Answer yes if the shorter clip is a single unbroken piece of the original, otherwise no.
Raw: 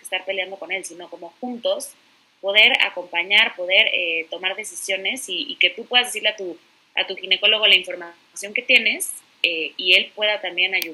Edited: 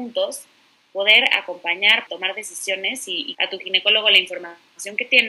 no